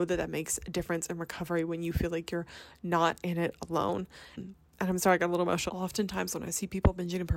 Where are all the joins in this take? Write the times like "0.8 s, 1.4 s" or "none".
4.3 s, 5.7 s